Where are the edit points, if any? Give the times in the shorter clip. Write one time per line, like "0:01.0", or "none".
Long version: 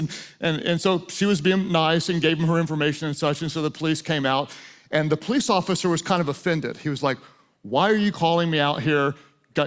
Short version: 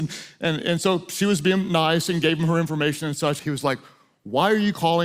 0:03.4